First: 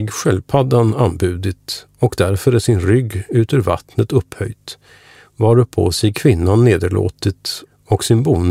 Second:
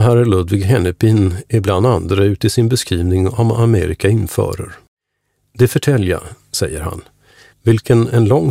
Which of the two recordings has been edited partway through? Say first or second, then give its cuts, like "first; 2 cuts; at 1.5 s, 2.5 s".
second; 1 cut; at 7.5 s